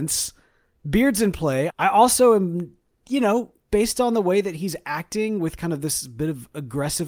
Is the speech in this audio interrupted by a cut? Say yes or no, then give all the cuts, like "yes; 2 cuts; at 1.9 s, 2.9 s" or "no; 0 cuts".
yes; 2 cuts; at 1.7 s, 3.6 s